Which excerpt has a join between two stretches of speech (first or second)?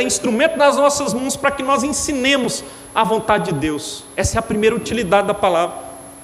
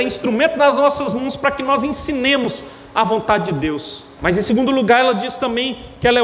second